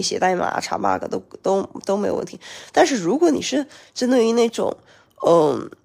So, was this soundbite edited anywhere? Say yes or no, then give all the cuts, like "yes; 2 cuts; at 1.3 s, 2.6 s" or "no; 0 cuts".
no; 0 cuts